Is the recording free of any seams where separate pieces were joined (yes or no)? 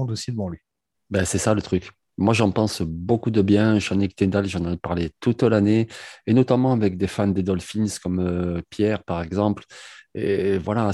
yes